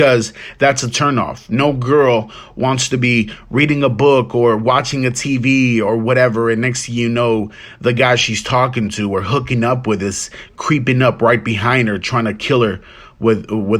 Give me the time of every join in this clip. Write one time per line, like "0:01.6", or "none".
none